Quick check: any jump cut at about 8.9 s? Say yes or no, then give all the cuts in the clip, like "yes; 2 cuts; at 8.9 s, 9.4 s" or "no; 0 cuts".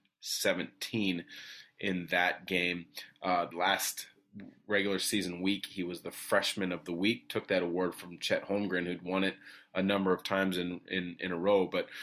no; 1 cut; at 3.5 s